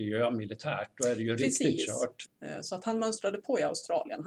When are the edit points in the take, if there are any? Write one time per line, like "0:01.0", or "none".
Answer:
0:02.2